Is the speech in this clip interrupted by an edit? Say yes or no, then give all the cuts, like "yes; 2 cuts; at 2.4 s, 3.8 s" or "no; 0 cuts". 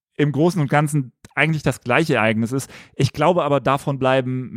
no; 0 cuts